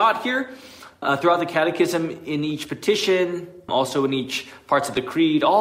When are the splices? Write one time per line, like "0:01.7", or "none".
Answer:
0:01.0
0:03.7